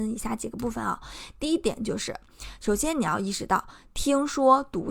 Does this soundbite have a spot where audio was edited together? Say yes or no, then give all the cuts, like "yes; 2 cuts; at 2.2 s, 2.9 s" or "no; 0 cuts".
no; 0 cuts